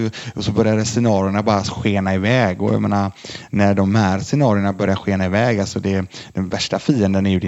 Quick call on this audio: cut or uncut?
uncut